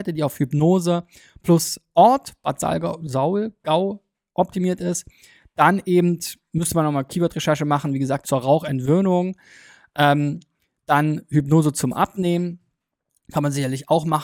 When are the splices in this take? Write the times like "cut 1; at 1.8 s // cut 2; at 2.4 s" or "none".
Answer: cut 1; at 8.2 s